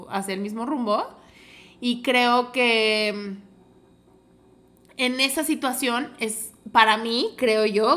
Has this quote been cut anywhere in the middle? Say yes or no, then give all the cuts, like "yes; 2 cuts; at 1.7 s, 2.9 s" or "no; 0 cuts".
no; 0 cuts